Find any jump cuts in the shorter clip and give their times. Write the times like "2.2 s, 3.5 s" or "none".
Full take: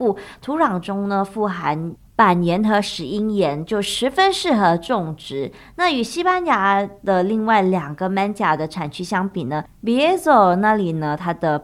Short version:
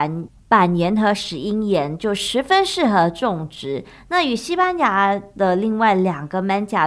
none